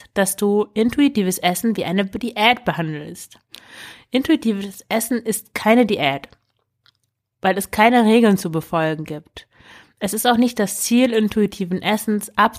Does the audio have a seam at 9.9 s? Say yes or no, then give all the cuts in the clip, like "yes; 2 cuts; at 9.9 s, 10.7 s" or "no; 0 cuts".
no; 0 cuts